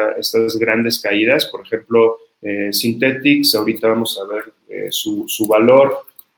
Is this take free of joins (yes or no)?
yes